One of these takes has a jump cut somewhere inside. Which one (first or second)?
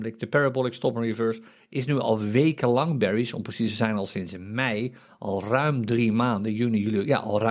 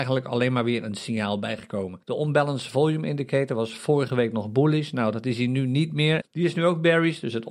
second